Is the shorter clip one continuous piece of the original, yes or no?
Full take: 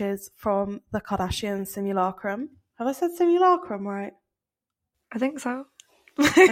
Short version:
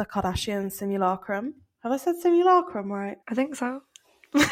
no